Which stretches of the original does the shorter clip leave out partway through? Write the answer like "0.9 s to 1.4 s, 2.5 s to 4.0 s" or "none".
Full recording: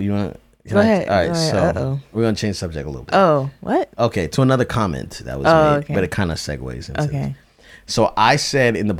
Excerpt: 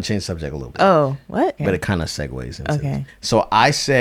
3.9 s to 5.9 s, 7.4 s to 7.7 s

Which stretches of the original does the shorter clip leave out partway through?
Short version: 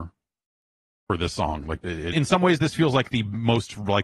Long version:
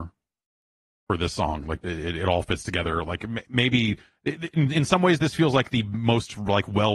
2.1 s to 4.7 s

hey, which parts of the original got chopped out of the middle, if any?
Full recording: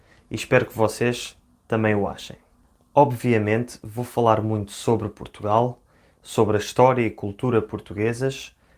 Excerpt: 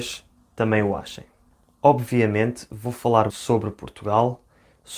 4.4 s to 4.7 s

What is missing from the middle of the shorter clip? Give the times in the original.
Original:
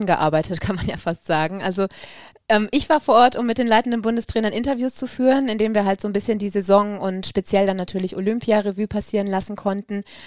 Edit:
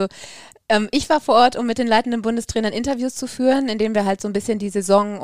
none

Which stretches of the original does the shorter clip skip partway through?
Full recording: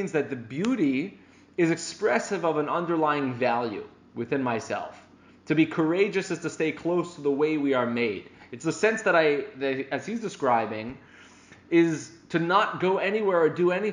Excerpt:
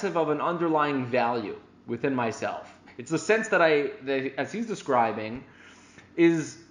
5.1 s to 8.4 s

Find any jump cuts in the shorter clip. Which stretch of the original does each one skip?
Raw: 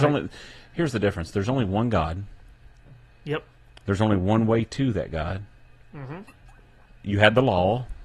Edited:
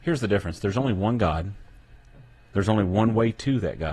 3.2 s to 3.8 s

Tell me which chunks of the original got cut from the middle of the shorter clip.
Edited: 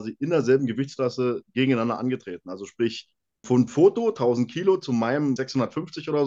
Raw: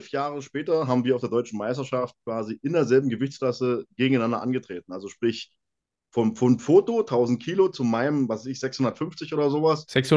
5.9 s to 6.4 s, 8.3 s to 8.6 s

